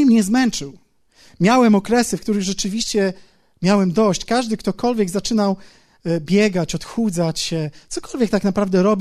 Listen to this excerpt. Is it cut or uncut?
uncut